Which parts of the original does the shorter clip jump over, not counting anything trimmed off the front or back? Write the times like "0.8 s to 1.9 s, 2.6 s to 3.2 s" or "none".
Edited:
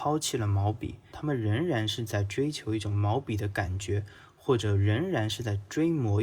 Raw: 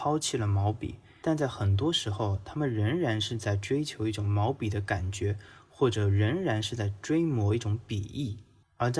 1.1 s to 2.4 s